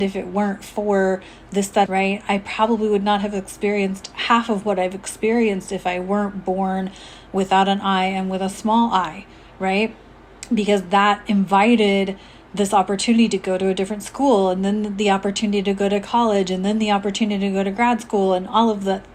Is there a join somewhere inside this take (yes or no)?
yes